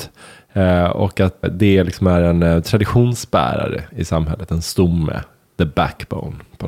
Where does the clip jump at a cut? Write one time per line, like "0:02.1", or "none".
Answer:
0:01.4